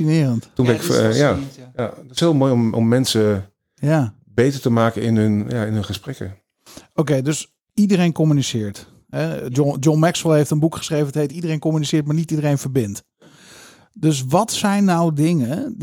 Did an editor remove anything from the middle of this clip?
no; 0 cuts

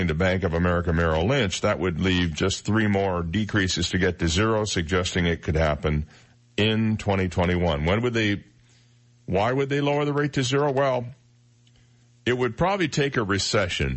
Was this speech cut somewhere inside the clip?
no; 0 cuts

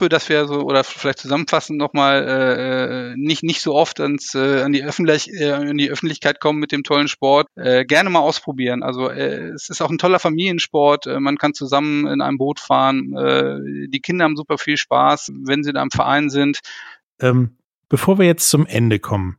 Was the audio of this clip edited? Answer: yes; 3 cuts; at 7.5 s, 15.3 s, 17.0 s

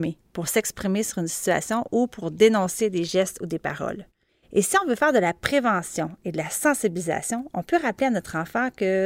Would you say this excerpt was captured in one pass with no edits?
yes; 0 cuts

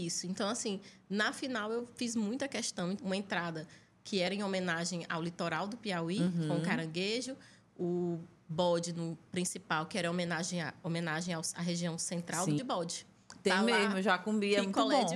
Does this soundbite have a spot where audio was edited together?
yes; 2 cuts; at 3.0 s, 12.6 s

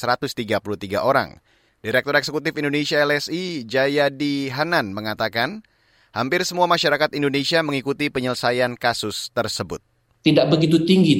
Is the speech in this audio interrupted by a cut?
yes; 1 cut; at 1.7 s

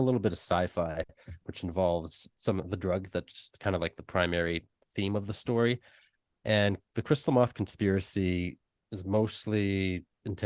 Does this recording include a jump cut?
yes; 1 cut; at 1.4 s

